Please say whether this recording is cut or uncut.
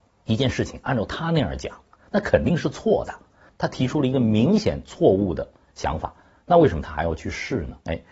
cut